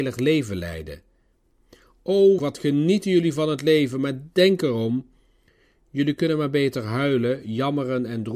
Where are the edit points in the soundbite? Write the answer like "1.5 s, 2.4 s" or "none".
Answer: 2.4 s